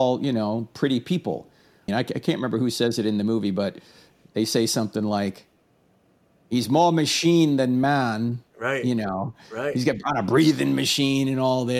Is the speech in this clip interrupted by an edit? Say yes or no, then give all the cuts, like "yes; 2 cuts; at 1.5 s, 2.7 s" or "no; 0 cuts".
yes; 1 cut; at 1.9 s